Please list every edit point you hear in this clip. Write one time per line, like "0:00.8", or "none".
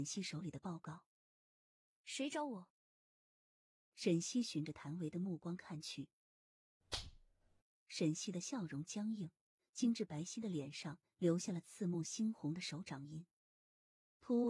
0:07.7